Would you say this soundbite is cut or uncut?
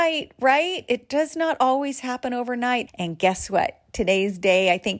cut